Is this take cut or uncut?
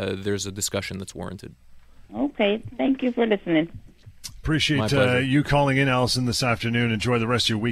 uncut